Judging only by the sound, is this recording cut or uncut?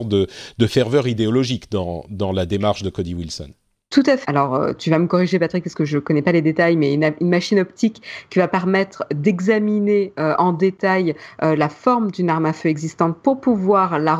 cut